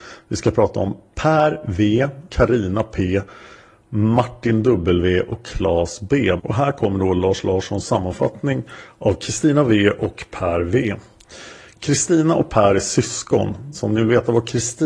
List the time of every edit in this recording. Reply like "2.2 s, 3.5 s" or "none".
2.3 s, 6.4 s, 13.7 s